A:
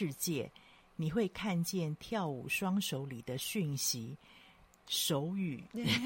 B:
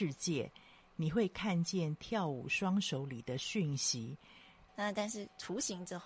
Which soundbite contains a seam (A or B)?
B